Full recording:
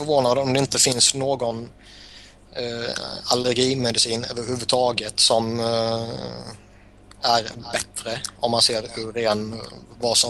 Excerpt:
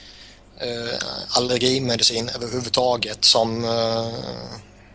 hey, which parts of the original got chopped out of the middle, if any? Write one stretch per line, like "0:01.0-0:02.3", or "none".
none